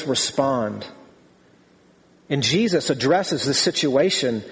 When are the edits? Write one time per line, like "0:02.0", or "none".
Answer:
0:02.3